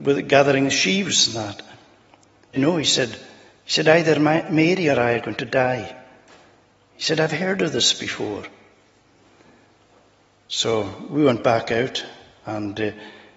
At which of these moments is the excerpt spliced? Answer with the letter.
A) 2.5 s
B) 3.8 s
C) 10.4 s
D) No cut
A